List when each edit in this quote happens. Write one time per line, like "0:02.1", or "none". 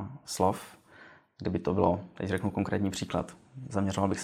none